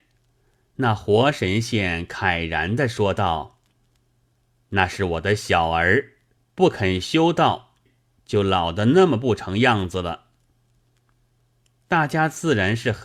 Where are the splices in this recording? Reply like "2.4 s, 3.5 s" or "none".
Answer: 6.4 s, 7.9 s